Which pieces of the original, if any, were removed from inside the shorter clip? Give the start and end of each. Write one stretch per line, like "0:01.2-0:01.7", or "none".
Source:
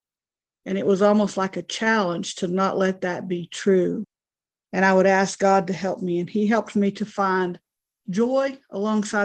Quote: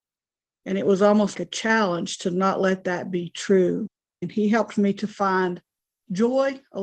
0:01.3-0:01.5
0:04.4-0:06.2